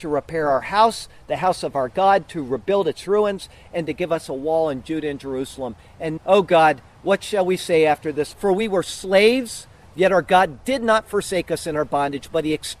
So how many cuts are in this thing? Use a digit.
2